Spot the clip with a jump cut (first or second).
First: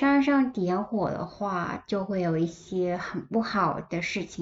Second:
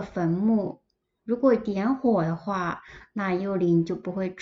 second